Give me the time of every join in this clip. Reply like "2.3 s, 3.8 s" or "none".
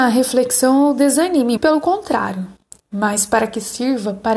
1.6 s

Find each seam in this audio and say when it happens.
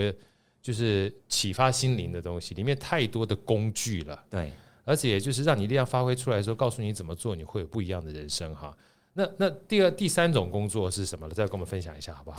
none

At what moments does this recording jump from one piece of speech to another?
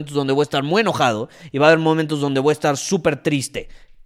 none

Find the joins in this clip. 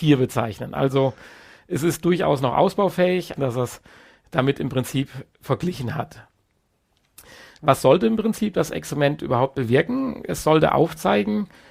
3.4 s

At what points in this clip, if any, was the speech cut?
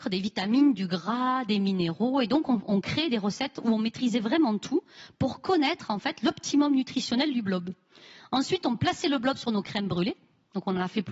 none

